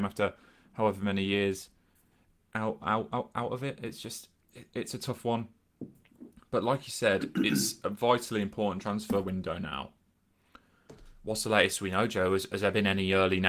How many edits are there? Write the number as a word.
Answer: one